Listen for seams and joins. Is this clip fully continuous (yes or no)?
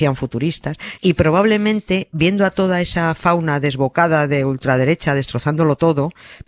no